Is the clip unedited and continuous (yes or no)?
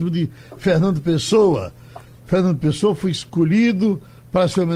yes